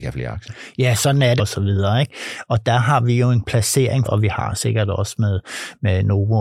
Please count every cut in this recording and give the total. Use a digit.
2